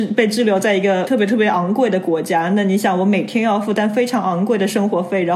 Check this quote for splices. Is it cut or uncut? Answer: uncut